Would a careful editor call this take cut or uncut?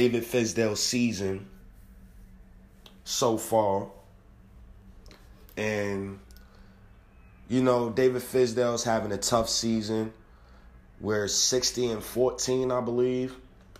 uncut